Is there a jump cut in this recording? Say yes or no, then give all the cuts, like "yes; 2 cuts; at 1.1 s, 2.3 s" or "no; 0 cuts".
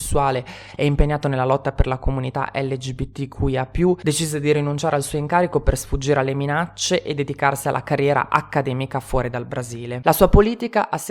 yes; 1 cut; at 10.0 s